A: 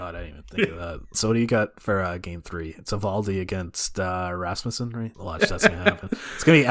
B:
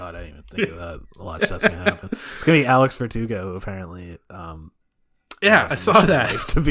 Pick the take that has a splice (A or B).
A